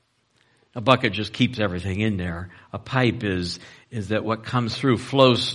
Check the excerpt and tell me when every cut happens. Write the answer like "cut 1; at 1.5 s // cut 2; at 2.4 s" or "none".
none